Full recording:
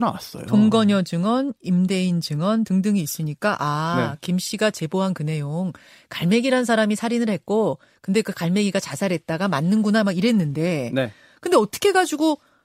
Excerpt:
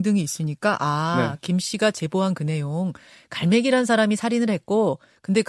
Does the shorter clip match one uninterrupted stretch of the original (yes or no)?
yes